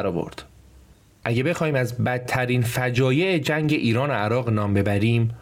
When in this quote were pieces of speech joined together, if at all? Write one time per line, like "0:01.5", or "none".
0:01.1